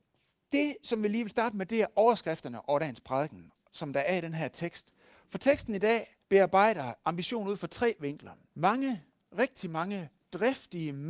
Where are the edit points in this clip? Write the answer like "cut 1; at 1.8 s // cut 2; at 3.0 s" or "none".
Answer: cut 1; at 6.2 s // cut 2; at 8.5 s